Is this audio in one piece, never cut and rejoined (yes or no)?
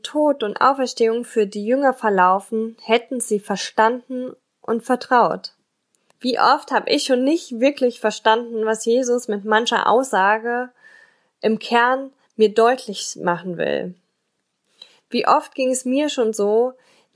no